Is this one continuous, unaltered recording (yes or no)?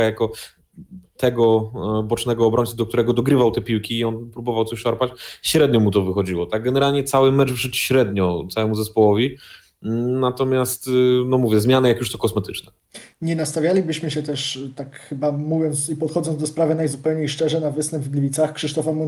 yes